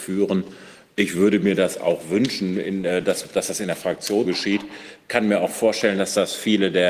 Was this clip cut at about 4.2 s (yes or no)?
yes